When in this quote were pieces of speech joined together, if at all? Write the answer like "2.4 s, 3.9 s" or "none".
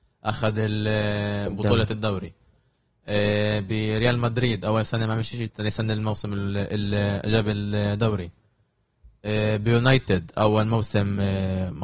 5.5 s

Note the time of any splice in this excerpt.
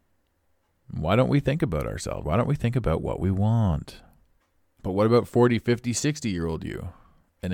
2.2 s, 4.8 s

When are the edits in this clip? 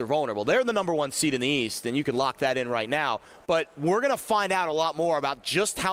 none

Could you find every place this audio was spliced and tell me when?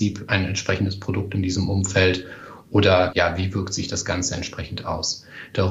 3.1 s

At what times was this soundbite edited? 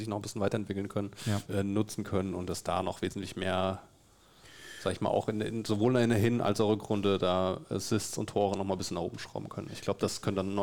1.4 s

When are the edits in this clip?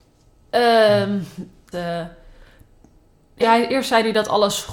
1.7 s, 3.4 s

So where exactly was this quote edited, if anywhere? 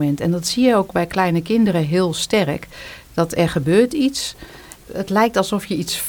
4.9 s

